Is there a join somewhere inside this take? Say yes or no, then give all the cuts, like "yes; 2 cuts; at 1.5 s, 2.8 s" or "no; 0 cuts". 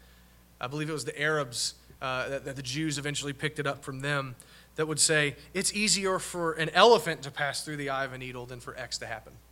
no; 0 cuts